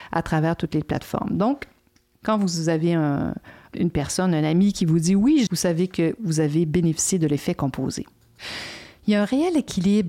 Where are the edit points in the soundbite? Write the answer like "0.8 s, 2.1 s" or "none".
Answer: 3.7 s, 5.5 s